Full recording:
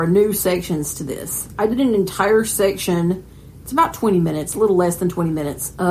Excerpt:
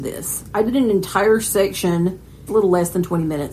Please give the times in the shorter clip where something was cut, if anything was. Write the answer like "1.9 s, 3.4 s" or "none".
2.5 s